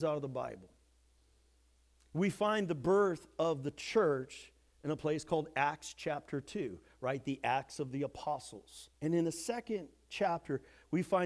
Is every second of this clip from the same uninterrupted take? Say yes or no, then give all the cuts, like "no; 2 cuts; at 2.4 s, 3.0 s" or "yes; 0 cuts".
no; 1 cut; at 8.9 s